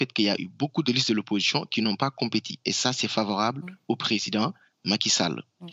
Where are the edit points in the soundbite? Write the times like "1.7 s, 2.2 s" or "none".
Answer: none

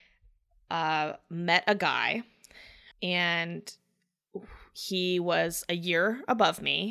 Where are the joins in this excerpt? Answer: 2.9 s

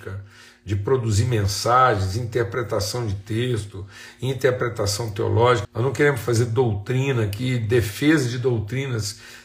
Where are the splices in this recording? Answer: 5.6 s

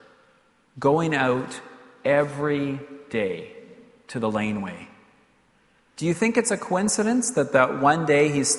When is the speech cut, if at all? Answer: none

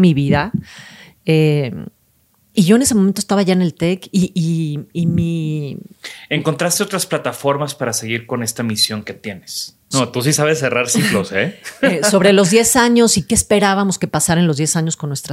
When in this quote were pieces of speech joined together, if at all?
9.9 s

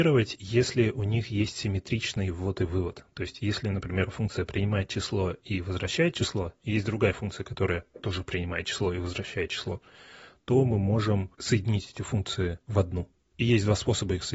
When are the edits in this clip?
none

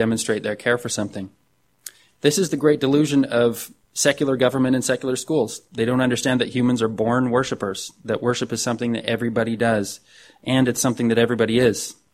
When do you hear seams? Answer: none

